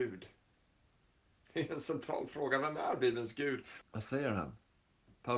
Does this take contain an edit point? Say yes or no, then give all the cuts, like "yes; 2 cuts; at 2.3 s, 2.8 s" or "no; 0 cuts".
yes; 1 cut; at 3.8 s